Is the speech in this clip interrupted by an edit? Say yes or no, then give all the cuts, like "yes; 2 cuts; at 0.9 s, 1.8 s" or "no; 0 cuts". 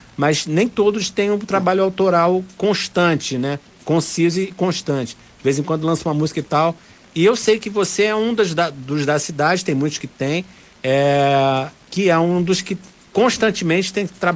no; 0 cuts